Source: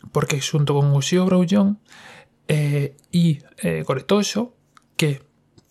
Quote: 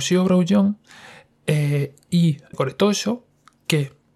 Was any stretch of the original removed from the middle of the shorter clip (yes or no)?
yes